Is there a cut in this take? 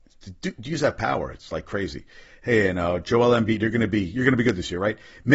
no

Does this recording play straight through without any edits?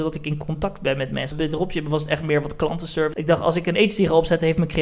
no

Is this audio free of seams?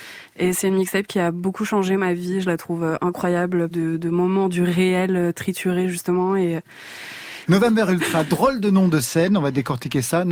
no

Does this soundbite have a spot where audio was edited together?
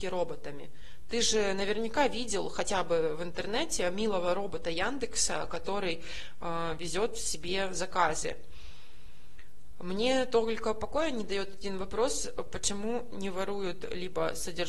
no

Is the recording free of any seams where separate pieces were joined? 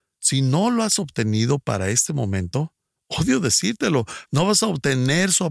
no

